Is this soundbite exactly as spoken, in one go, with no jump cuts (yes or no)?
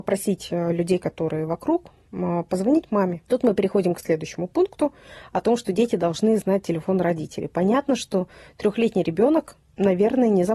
no